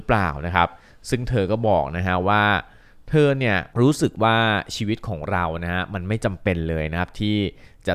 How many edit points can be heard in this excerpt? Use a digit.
1